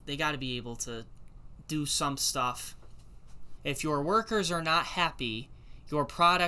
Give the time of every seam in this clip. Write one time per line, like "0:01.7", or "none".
0:03.6